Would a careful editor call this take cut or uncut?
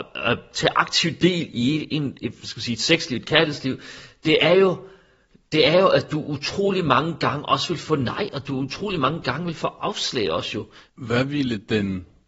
uncut